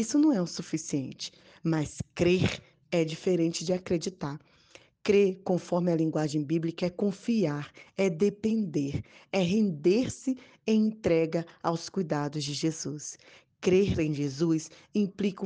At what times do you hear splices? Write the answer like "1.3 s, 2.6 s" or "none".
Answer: none